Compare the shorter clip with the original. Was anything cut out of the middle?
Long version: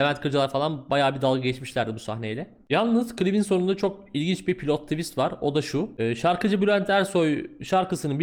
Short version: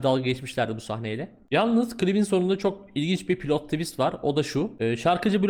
no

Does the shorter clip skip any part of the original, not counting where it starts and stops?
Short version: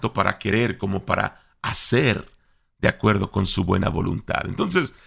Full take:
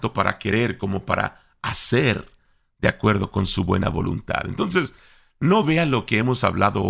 no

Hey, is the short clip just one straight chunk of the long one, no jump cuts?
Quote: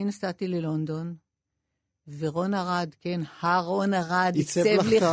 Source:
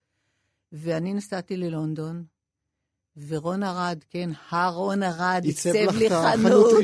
yes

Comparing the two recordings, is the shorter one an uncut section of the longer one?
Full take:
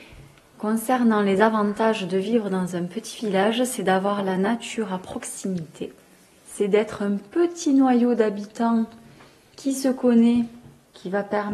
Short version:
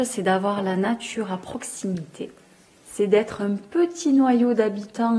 yes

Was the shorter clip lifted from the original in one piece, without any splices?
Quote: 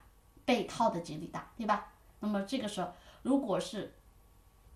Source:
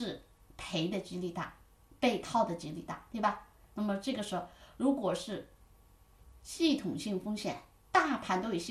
yes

